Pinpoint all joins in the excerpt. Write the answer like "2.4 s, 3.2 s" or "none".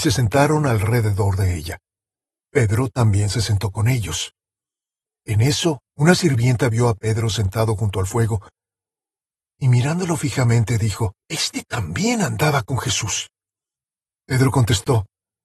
5.9 s, 11.2 s, 14.1 s